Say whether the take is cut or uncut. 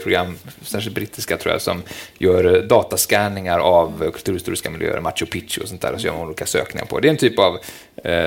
uncut